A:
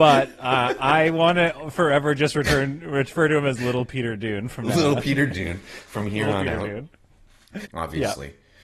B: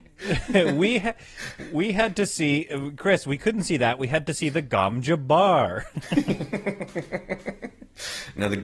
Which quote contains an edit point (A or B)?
A